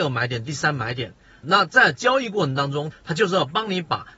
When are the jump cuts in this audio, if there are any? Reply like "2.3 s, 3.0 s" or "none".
1.4 s, 2.9 s